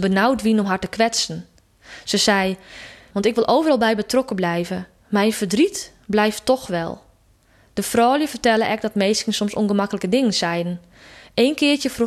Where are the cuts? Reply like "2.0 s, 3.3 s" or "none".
3.1 s